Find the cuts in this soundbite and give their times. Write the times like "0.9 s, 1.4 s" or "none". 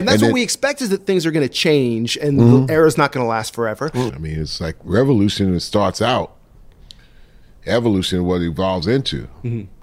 4.1 s